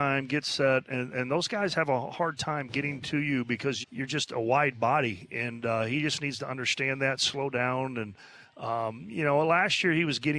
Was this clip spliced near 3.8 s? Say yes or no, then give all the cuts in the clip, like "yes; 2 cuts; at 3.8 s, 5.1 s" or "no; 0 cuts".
yes; 1 cut; at 3.8 s